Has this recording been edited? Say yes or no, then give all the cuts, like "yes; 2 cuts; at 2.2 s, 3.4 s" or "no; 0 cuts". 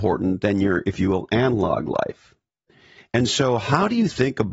yes; 1 cut; at 3.0 s